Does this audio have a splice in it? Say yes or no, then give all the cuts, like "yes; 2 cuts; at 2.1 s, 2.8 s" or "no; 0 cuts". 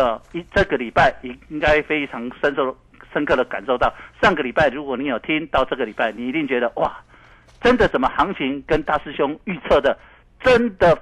no; 0 cuts